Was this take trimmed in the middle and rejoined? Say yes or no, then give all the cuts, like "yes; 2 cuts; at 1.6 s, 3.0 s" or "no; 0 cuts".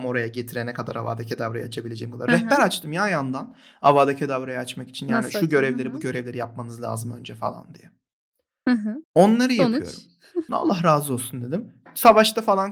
yes; 2 cuts; at 9.0 s, 10.5 s